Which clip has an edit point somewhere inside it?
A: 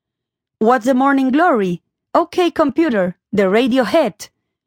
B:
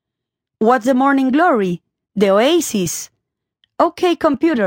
A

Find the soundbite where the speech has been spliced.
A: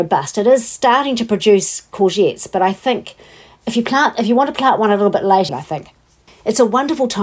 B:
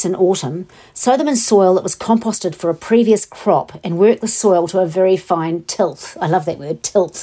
A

